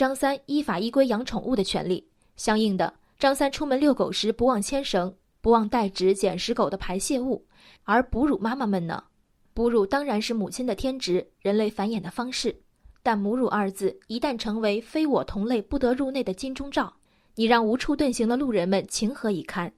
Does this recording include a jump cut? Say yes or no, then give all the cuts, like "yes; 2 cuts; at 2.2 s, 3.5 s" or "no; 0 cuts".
yes; 1 cut; at 7.8 s